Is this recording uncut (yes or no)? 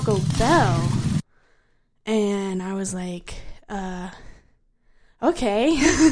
yes